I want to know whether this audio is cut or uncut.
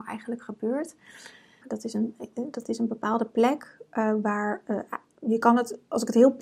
cut